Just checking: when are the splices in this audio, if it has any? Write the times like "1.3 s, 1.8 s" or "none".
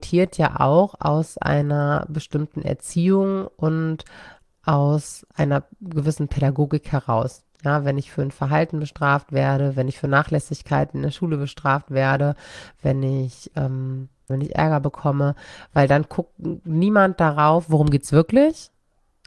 14.3 s